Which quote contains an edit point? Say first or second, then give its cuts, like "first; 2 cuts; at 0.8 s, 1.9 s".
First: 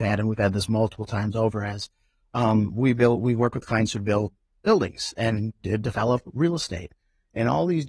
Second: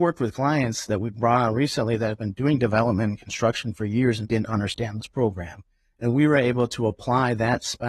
second; 1 cut; at 4.2 s